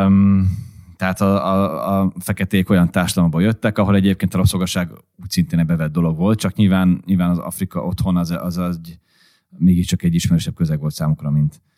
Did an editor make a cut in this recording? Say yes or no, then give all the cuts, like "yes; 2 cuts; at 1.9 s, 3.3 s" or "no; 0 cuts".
no; 0 cuts